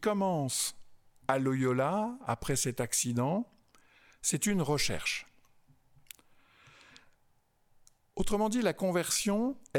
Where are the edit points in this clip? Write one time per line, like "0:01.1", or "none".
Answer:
none